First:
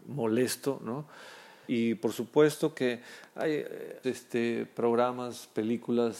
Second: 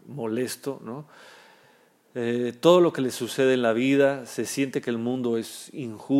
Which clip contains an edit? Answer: first; 2 cuts; at 1.7 s, 4.0 s

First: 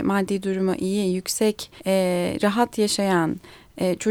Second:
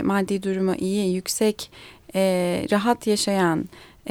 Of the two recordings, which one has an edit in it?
first; 1 cut; at 1.8 s

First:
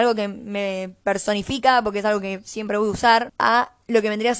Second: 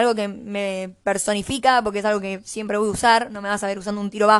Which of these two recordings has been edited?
first; 1 cut; at 3.3 s

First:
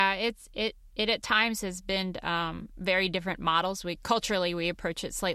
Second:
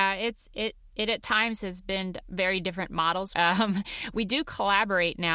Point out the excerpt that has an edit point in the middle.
second; 2 cuts; at 2.2 s, 3.3 s

